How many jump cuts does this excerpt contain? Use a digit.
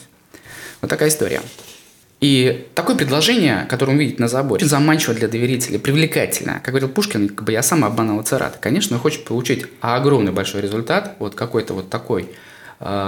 1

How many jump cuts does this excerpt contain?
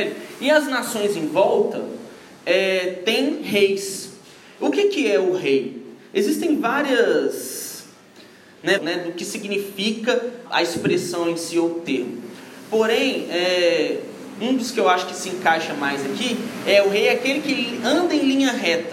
2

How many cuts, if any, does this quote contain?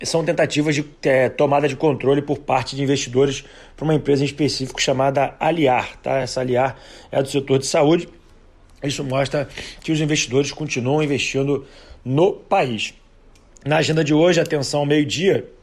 0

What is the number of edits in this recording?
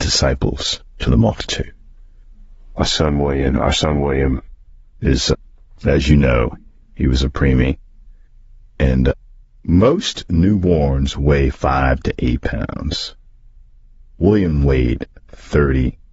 0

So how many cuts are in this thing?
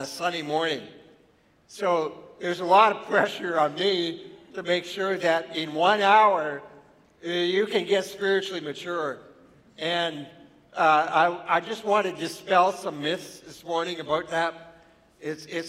0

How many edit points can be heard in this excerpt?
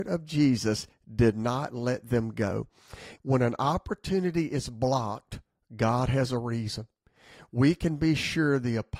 1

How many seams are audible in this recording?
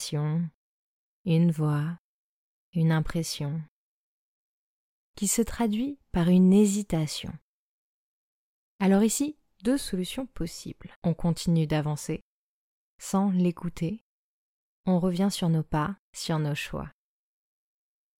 3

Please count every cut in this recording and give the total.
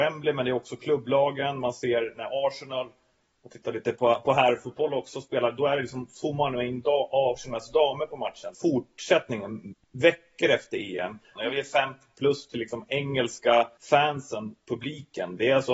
3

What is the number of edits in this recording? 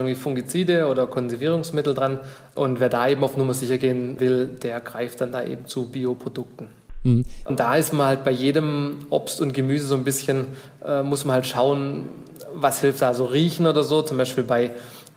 1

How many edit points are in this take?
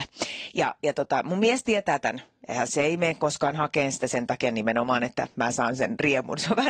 1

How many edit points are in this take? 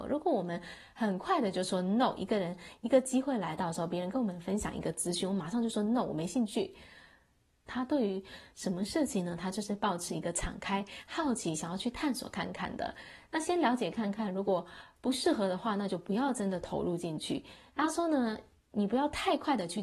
2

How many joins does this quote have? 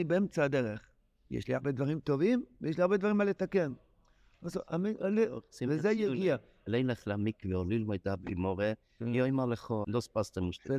1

